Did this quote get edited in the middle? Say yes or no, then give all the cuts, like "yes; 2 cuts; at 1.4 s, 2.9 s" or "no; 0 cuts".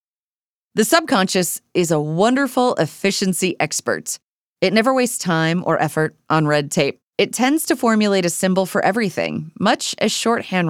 yes; 1 cut; at 7.1 s